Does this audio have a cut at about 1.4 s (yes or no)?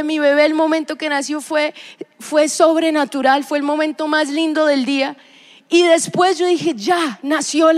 no